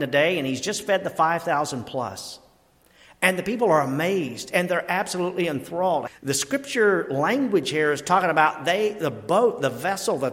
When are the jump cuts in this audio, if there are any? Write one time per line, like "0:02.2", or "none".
0:06.1